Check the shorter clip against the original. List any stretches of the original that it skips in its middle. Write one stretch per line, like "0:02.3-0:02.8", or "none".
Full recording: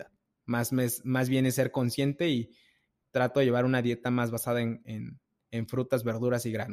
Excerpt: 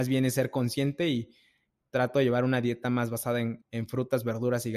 0:04.8-0:05.4

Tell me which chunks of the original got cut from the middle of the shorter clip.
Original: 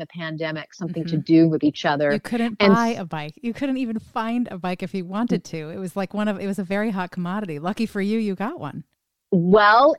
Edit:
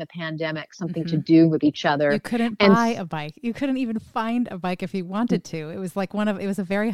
none

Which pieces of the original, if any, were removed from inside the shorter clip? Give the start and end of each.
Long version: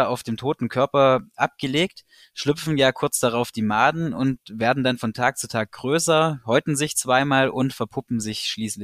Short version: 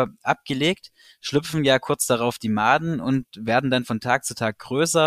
none

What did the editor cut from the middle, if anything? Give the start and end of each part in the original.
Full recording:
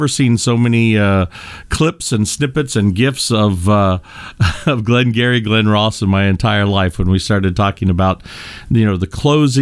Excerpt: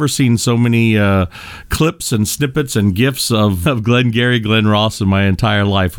0:03.6-0:04.6

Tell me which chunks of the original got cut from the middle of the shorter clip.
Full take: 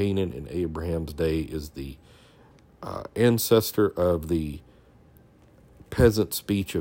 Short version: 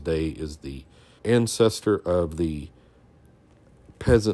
0:02.3-0:03.1

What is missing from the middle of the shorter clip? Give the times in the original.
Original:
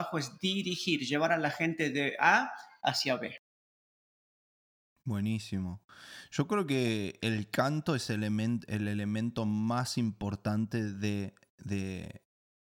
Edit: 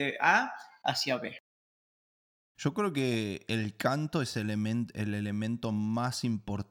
0:04.5-0:06.3

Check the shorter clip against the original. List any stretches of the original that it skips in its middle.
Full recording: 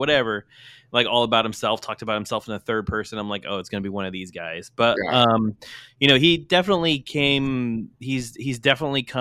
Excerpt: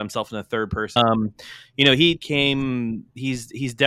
0:03.1-0:05.2
0:06.4-0:07.0

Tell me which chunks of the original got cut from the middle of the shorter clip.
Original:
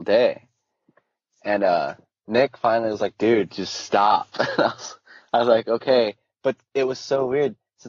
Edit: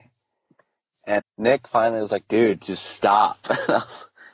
0:01.6-0:02.1

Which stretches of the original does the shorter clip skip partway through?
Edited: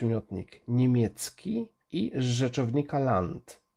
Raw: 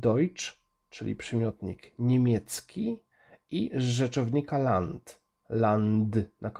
0:03.1-0:03.4

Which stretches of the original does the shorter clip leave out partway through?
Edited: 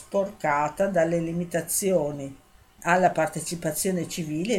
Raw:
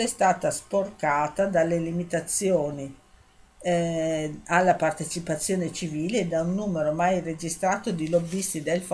0:03.4-0:04.4

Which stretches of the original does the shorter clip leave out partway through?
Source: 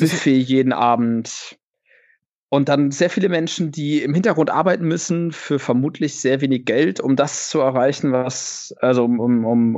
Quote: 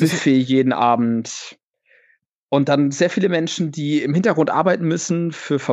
none

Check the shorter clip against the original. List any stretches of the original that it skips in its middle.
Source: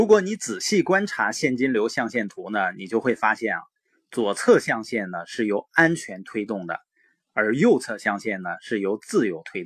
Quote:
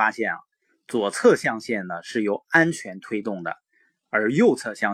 none

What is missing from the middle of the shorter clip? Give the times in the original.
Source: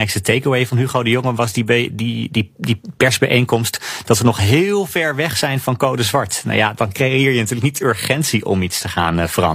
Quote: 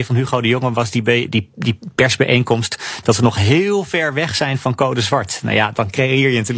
0:01.9-0:02.3

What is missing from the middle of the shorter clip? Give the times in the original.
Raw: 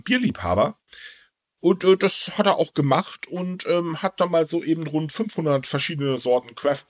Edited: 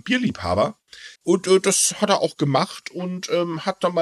0:01.2-0:01.5

